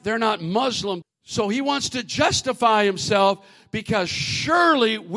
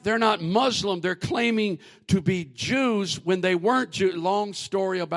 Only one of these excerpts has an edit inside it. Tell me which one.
first; 1 cut; at 1.0 s

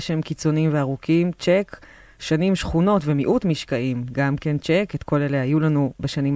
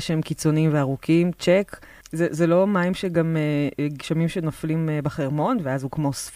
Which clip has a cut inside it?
second; 1 cut; at 2.0 s

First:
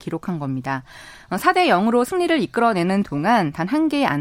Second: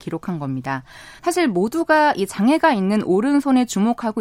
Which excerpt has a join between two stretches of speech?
second; 1 cut; at 1.2 s

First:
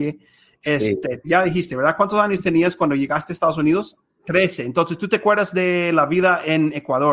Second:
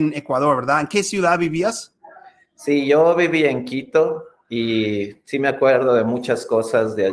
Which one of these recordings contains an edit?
first; 2 cuts; at 1.2 s, 4.2 s

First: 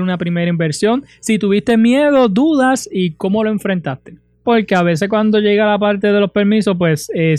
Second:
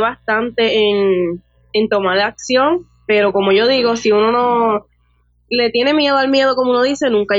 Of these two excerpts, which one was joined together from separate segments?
first; 1 cut; at 4.4 s

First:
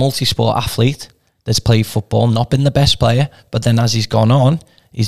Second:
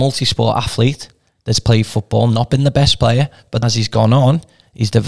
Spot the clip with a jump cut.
second; 1 cut; at 3.6 s

